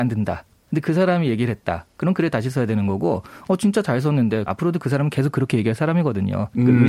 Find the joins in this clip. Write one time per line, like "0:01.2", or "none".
0:04.5